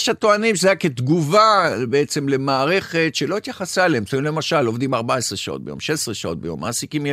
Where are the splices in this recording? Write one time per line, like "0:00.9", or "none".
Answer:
none